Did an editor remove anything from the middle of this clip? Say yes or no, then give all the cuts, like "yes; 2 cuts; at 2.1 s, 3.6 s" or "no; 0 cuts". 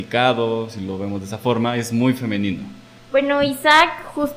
yes; 1 cut; at 3.0 s